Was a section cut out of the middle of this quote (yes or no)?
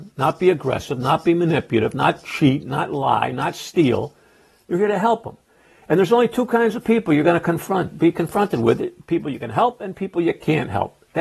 no